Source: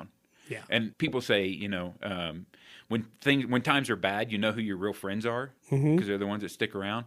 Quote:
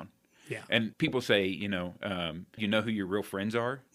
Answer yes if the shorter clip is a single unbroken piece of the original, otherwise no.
no